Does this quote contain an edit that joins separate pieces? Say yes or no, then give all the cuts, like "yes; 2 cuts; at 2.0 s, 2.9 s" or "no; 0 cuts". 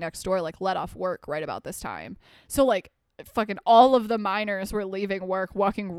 no; 0 cuts